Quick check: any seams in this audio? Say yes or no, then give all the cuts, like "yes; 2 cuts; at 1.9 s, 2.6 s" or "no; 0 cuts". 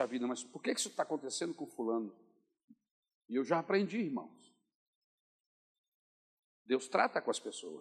no; 0 cuts